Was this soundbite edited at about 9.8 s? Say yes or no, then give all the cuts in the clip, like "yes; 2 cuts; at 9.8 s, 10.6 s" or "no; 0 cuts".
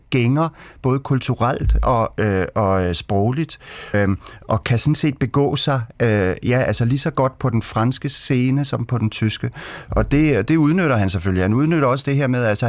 no; 1 cut; at 3.9 s